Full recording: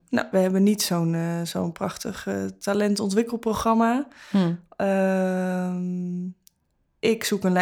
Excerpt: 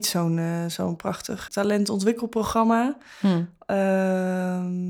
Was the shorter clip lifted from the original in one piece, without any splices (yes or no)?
no